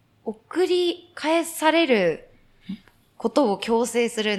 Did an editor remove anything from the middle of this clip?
no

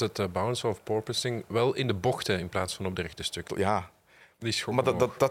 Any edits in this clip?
yes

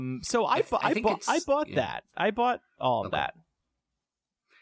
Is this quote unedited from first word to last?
yes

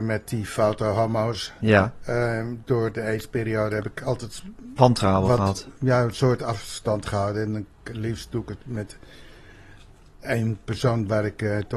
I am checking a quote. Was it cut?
no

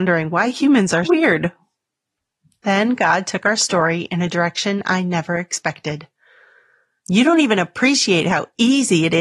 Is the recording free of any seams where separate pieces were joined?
no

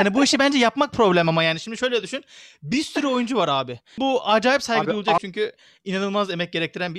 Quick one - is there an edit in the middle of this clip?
yes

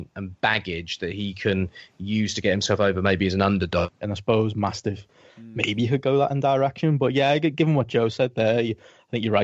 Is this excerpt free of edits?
no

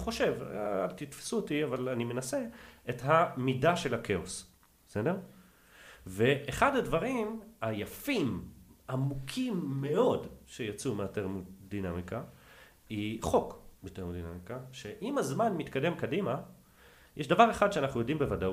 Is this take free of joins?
no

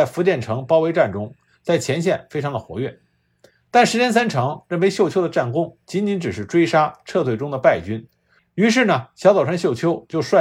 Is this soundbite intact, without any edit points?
no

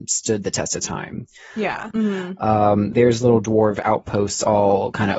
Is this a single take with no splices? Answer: no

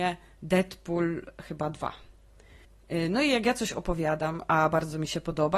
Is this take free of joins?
yes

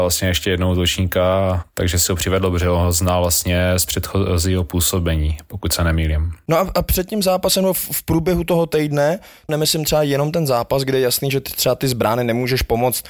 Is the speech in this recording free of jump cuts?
no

